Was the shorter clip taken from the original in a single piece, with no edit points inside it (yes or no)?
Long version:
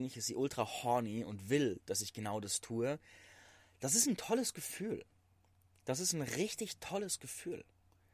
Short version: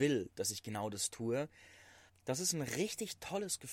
no